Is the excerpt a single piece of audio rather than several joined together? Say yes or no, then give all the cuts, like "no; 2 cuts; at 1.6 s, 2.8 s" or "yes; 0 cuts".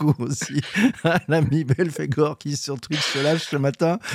yes; 0 cuts